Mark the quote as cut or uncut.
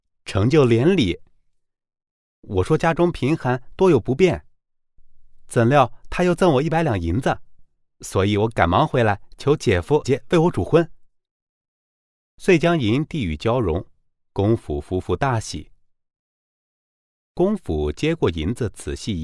cut